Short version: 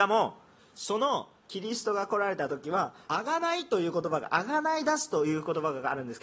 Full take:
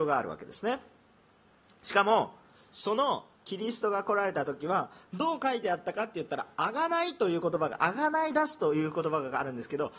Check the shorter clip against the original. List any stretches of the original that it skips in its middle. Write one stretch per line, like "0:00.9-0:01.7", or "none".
0:05.0-0:06.5